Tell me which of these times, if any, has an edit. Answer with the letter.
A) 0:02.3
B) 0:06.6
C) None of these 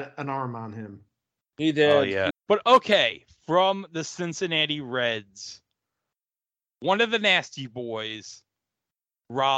A